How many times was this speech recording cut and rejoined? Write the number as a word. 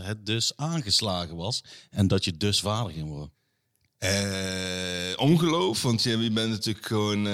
zero